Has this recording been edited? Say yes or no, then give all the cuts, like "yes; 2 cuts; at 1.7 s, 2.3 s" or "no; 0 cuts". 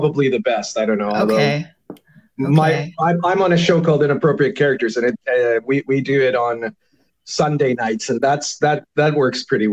no; 0 cuts